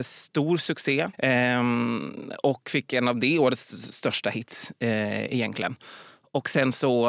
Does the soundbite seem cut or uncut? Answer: cut